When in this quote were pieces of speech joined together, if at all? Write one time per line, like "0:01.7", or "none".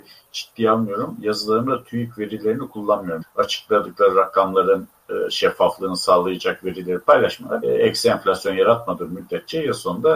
0:03.2
0:07.6